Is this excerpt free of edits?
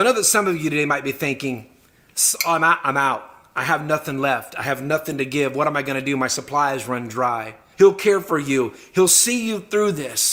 no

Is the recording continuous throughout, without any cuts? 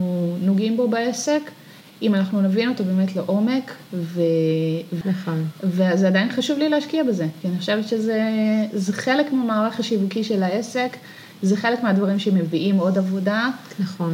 no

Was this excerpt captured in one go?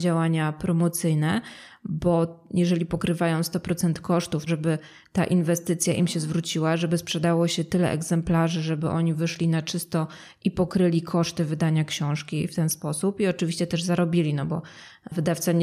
no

